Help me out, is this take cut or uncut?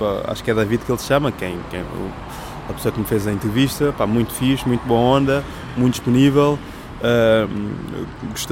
uncut